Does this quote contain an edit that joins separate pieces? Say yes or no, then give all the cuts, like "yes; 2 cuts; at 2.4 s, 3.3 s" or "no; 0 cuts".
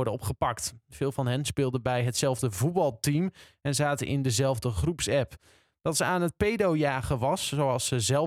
no; 0 cuts